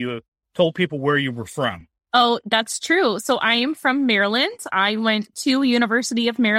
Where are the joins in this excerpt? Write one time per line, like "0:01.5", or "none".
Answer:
0:04.7